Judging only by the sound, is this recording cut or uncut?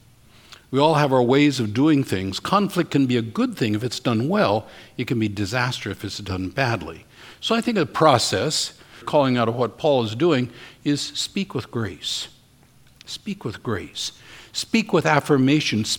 cut